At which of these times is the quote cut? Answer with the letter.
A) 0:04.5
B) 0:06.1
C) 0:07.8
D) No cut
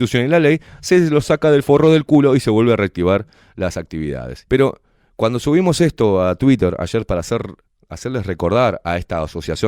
A